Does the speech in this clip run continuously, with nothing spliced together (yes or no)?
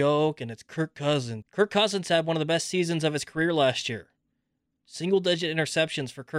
no